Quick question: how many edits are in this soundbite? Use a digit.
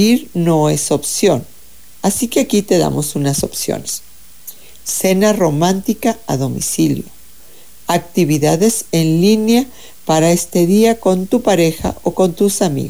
0